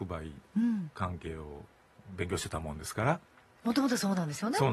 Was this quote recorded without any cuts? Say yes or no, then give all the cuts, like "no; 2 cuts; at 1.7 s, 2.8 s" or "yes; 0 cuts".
yes; 0 cuts